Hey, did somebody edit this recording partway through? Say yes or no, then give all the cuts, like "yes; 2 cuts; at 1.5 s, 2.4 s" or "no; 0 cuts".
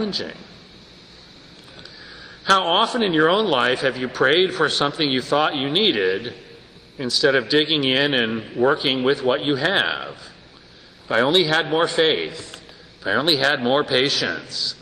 no; 0 cuts